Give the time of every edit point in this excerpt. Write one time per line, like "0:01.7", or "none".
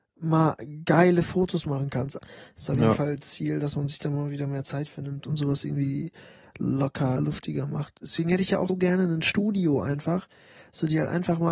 0:02.2
0:07.2
0:08.7